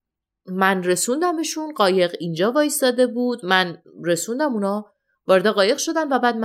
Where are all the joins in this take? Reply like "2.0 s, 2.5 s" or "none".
none